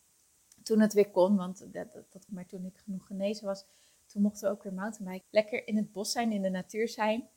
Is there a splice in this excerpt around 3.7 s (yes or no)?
no